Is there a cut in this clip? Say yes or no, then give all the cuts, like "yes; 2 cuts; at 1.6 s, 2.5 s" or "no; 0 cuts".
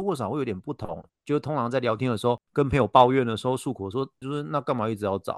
yes; 3 cuts; at 1.1 s, 2.5 s, 4.2 s